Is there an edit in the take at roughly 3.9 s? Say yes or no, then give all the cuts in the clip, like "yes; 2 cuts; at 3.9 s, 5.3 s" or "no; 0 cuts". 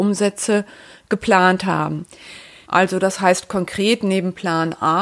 no; 1 cut; at 2.6 s